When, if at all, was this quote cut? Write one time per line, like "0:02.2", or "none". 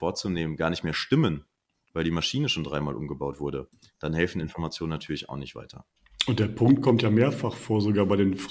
none